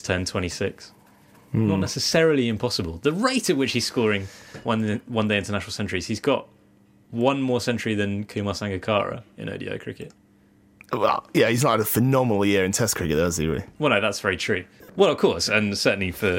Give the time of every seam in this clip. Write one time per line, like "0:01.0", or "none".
0:14.9